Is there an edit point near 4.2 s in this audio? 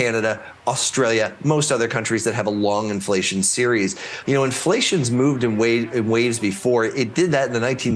yes; 1 cut; at 4.2 s

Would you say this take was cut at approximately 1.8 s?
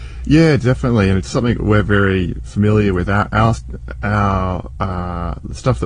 no; 0 cuts

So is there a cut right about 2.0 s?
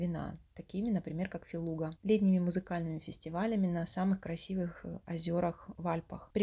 yes; 1 cut; at 2.0 s

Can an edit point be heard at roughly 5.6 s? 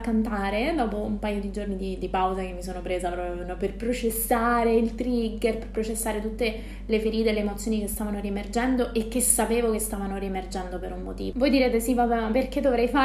no; 1 cut; at 11.3 s

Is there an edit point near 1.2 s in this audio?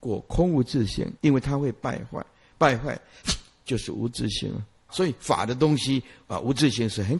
yes; 2 cuts; at 1.2 s, 4.9 s

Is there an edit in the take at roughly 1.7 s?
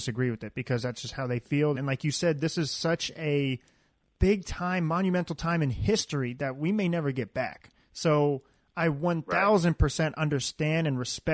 yes; 1 cut; at 1.7 s

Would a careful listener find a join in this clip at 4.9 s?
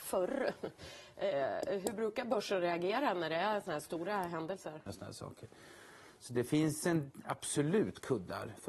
yes; 1 cut; at 4.9 s

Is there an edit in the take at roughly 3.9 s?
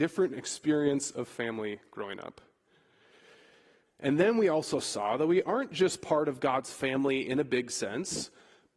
yes; 1 cut; at 3.9 s

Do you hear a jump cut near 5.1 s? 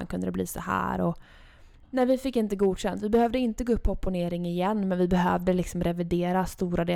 no; 1 cut; at 1.8 s

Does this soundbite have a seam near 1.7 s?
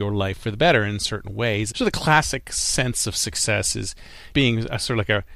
yes; 2 cuts; at 1.7 s, 4.3 s

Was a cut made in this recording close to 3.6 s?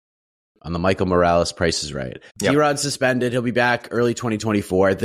no; 1 cut; at 2.3 s

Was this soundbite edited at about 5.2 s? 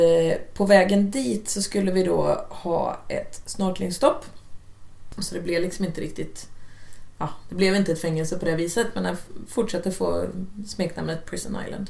yes; 1 cut; at 5.2 s

